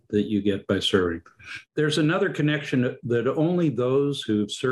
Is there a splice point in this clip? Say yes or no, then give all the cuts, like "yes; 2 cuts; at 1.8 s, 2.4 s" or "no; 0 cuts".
no; 0 cuts